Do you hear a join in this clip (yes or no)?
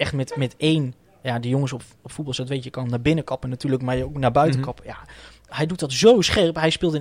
no